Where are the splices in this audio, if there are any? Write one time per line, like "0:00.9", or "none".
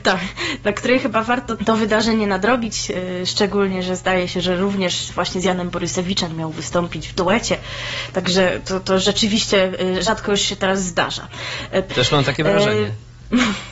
0:01.6
0:11.9